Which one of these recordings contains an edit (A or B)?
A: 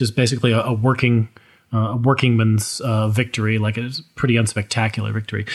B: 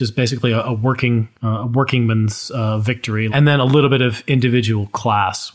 B